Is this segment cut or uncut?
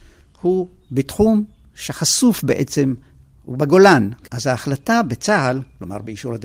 cut